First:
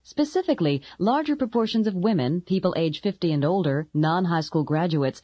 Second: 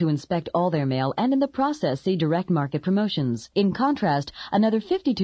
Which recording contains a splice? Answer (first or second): second